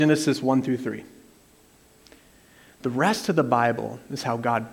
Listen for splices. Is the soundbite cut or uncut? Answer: uncut